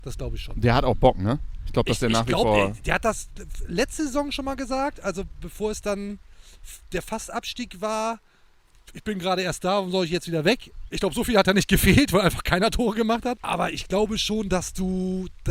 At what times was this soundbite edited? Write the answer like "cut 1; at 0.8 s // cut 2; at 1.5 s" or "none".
cut 1; at 10.9 s // cut 2; at 13.4 s